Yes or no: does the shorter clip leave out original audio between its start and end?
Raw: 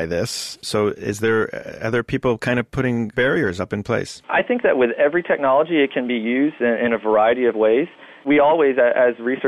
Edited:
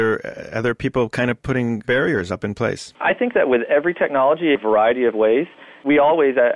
yes